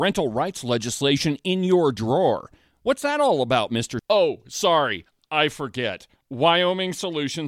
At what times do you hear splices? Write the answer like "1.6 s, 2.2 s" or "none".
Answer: 4.0 s